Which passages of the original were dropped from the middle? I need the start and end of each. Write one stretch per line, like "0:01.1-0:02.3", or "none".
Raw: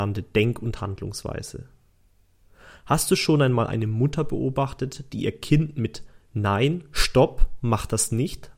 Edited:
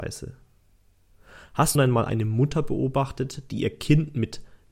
0:03.1-0:03.4